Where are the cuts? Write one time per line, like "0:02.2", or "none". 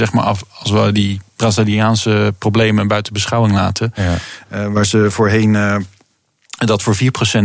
none